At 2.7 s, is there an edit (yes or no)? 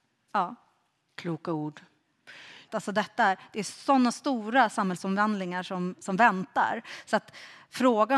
yes